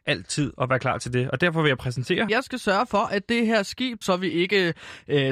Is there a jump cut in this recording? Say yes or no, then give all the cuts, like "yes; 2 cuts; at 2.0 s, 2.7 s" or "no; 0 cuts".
yes; 2 cuts; at 2.3 s, 4.0 s